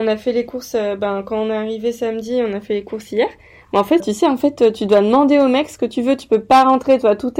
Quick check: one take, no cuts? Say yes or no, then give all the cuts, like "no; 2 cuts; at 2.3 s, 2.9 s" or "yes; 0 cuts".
no; 1 cut; at 4.0 s